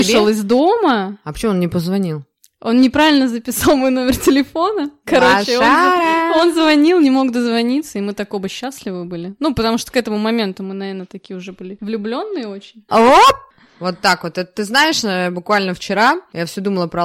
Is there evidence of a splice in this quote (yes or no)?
yes